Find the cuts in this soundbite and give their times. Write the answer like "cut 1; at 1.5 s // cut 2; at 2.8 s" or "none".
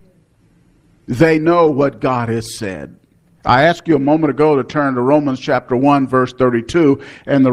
cut 1; at 3.4 s